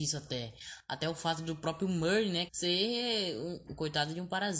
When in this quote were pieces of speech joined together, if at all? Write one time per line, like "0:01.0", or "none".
0:02.5
0:03.7

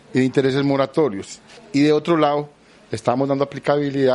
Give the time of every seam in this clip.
0:01.6

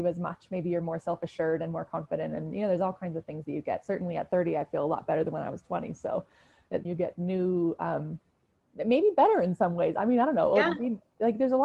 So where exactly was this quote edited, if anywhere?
0:06.8

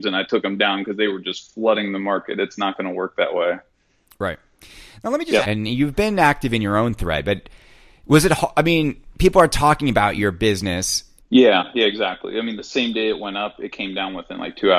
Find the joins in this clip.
0:05.4
0:11.2

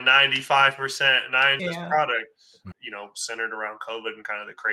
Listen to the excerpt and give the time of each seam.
0:01.6
0:02.7

